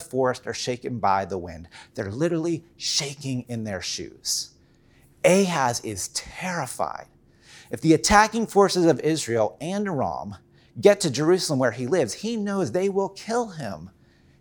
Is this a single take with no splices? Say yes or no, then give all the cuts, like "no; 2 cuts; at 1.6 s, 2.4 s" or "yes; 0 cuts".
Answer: yes; 0 cuts